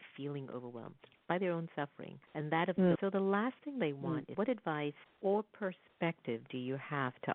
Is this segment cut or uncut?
cut